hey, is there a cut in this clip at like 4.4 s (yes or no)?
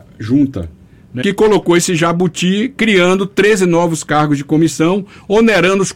no